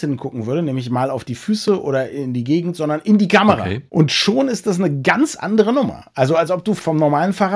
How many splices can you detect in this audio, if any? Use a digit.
0